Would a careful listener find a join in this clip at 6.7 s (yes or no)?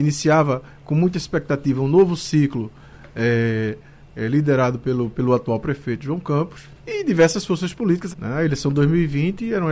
yes